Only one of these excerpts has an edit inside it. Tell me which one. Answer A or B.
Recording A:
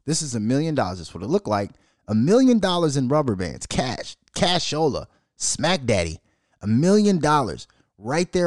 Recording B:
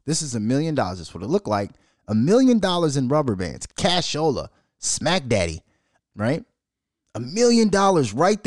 B